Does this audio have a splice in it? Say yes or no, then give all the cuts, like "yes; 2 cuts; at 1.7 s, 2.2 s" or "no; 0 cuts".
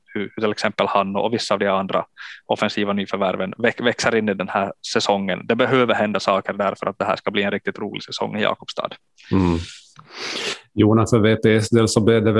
no; 0 cuts